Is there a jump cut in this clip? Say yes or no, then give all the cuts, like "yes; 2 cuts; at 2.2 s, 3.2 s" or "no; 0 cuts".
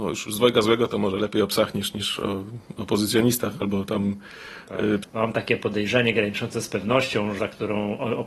yes; 2 cuts; at 5.0 s, 7.4 s